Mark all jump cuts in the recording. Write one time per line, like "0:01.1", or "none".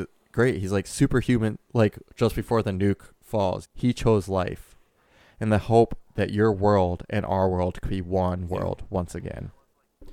0:03.6